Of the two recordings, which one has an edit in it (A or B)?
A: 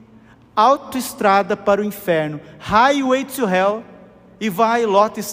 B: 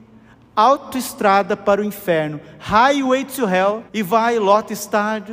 B